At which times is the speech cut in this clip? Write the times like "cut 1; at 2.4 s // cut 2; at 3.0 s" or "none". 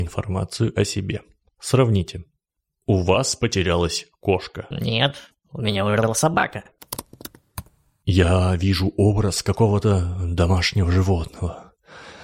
none